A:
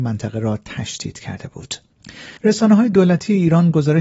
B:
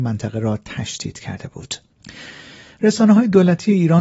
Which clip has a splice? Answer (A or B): A